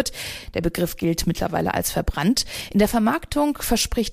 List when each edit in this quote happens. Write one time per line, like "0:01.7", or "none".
0:01.7